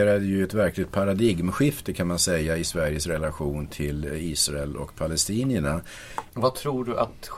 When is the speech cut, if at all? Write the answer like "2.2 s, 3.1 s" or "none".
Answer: 6.3 s